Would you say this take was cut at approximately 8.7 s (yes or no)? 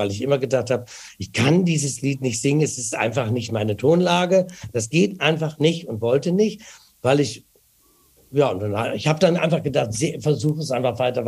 no